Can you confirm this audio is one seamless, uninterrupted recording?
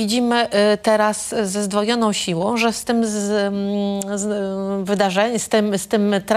yes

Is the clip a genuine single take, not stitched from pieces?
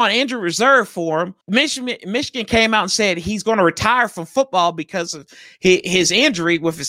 no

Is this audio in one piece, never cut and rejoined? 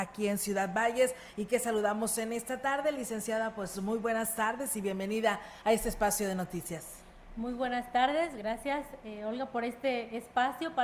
yes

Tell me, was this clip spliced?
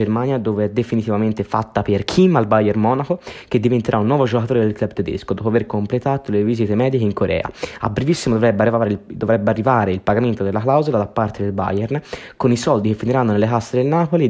no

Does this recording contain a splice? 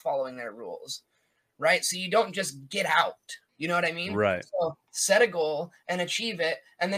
yes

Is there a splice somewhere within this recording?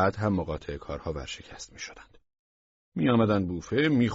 no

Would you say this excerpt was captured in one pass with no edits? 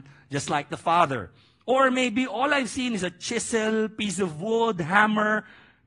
yes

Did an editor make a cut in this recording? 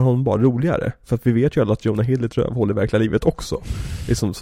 no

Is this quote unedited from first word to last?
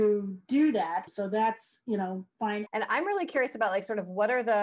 no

